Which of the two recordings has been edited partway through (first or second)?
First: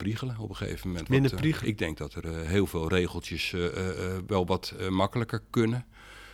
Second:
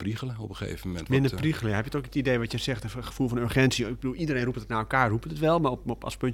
first